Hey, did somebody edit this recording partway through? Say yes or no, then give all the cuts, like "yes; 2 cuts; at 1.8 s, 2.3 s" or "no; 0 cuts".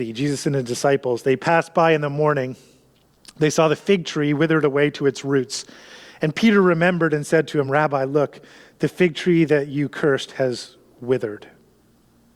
no; 0 cuts